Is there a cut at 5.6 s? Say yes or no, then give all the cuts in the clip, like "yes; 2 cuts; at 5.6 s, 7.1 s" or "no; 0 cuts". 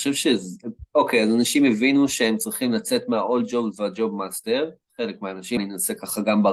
yes; 1 cut; at 5.6 s